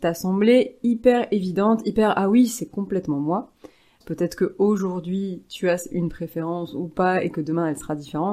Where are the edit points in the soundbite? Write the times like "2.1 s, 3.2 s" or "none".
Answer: 4.0 s